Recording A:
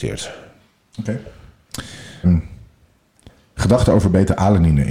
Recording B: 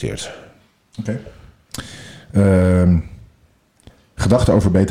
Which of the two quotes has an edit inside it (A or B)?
A